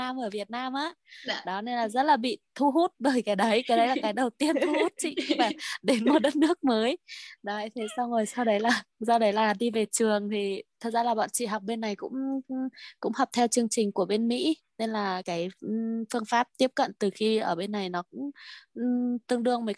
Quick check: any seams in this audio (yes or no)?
yes